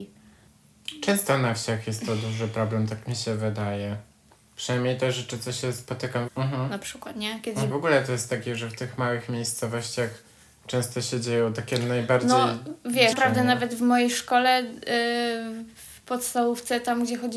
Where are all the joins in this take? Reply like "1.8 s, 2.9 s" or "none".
6.3 s, 7.7 s, 13.1 s